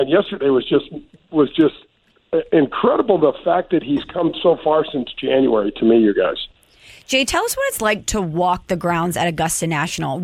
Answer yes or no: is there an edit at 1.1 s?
no